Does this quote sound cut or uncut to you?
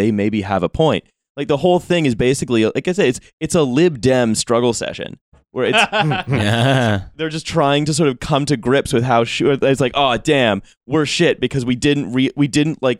uncut